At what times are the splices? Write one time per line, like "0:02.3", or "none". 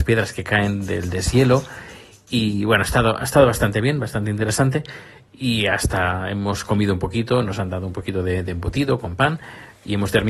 none